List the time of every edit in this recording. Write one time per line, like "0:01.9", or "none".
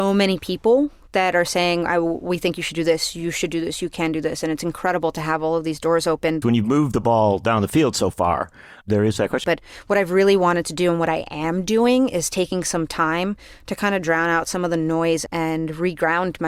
0:06.4
0:09.4
0:15.3